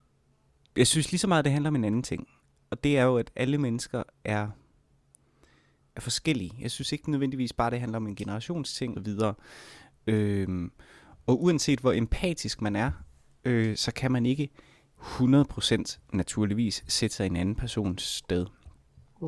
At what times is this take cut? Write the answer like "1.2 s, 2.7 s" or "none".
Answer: 8.9 s